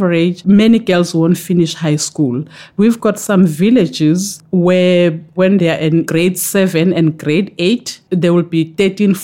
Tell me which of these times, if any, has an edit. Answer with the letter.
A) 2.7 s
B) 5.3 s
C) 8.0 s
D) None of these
D